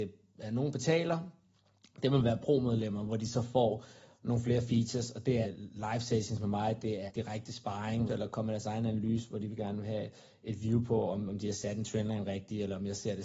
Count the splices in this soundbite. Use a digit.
3